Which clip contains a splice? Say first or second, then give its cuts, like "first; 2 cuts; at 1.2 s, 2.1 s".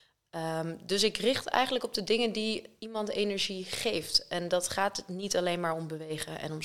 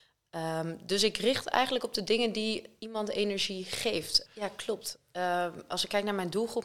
second; 1 cut; at 4.3 s